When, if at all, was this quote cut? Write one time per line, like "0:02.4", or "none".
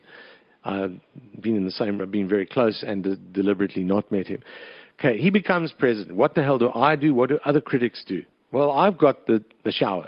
none